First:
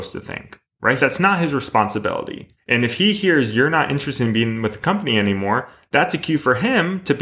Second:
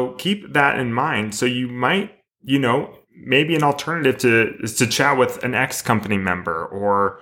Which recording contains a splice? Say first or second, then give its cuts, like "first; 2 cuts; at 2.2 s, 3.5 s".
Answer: first; 2 cuts; at 1.0 s, 2.6 s